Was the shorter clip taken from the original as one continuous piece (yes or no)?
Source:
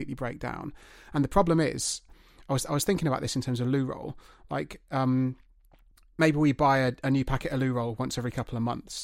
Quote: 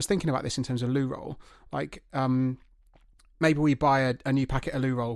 yes